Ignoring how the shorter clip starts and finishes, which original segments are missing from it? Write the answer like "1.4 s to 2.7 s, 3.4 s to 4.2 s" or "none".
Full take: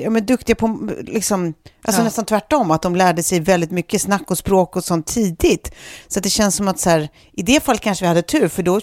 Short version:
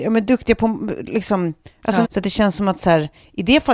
2.0 s to 6.0 s